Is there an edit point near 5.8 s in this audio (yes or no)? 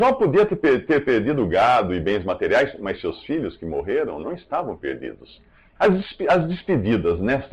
yes